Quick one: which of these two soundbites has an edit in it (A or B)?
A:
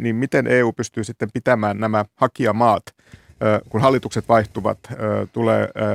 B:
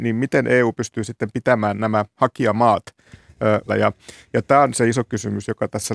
B